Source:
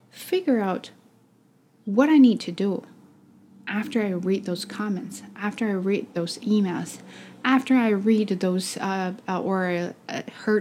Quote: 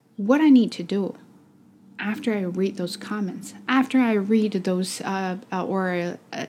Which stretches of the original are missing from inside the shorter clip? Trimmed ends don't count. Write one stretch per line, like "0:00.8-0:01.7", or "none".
0:05.3-0:07.4